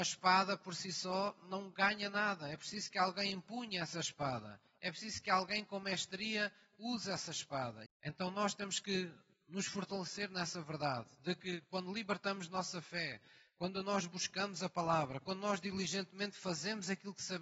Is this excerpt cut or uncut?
cut